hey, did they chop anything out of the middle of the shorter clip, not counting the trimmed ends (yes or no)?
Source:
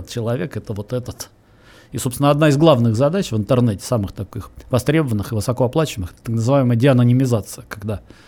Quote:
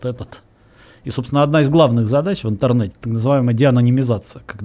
yes